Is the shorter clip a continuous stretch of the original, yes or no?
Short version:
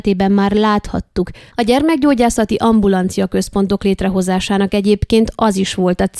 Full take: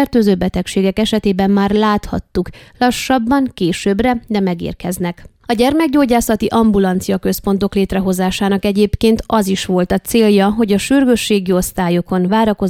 no